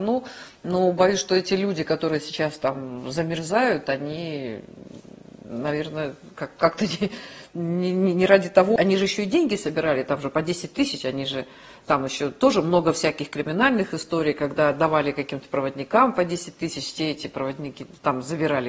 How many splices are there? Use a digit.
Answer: 1